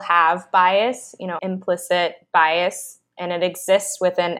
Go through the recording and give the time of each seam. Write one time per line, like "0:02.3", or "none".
0:01.4